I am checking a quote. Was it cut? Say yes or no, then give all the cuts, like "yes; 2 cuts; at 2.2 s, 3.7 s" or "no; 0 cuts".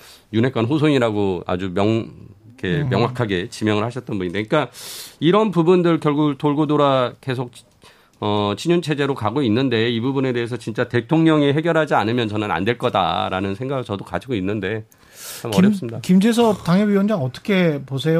no; 0 cuts